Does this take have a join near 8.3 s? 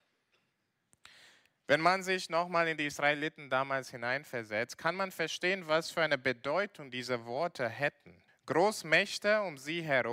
yes; 1 cut; at 8.3 s

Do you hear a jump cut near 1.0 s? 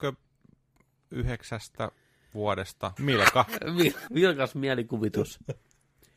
no; 2 cuts; at 3.0 s, 4.1 s

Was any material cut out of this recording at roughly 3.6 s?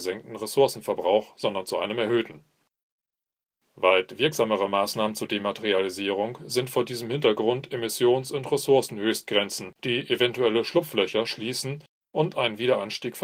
no; 1 cut; at 9.8 s

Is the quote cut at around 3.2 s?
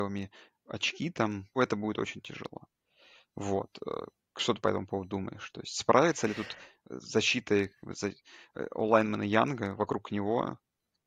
no; 1 cut; at 1.6 s

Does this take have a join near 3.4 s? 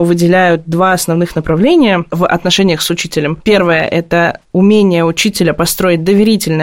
no; 0 cuts

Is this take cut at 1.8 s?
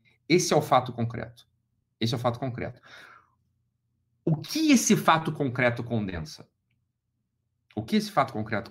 no; 0 cuts

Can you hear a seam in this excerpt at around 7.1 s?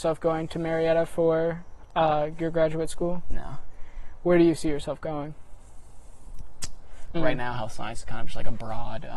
yes; 1 cut; at 7.1 s

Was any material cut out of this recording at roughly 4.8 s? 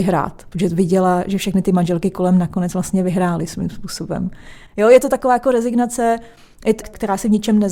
no; 1 cut; at 6.8 s

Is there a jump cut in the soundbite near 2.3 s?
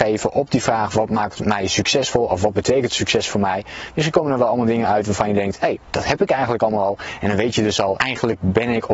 no; 1 cut; at 8.0 s

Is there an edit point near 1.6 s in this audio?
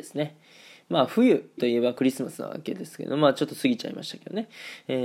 yes; 1 cut; at 1.6 s

